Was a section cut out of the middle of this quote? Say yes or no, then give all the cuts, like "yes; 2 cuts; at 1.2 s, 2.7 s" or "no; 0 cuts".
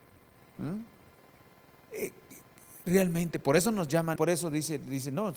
yes; 2 cuts; at 1.9 s, 4.2 s